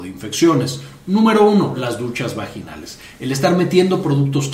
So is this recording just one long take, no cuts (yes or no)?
no